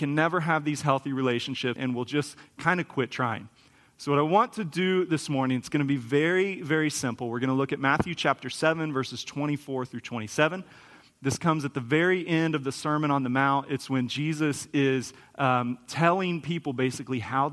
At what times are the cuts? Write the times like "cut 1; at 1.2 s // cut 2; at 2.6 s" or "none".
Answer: cut 1; at 1.8 s